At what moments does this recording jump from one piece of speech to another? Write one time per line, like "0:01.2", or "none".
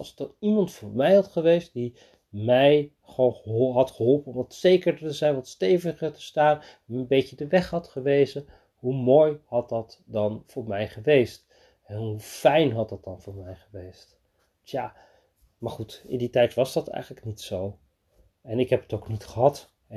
none